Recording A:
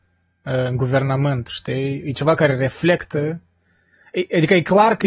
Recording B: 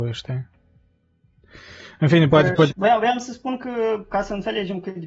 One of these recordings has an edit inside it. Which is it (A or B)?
B